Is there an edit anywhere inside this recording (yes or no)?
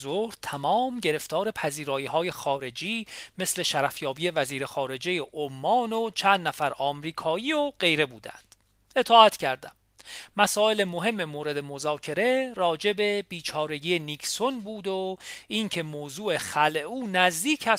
no